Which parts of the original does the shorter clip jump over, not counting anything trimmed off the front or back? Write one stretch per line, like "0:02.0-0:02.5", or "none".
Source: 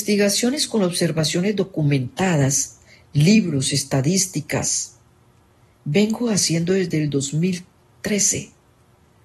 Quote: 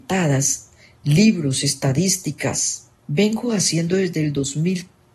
0:05.1-0:05.7